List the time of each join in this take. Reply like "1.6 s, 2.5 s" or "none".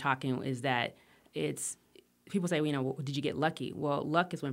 none